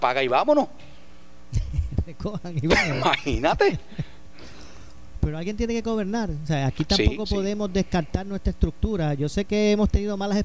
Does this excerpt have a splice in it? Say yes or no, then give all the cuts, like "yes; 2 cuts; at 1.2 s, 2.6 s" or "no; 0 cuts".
no; 0 cuts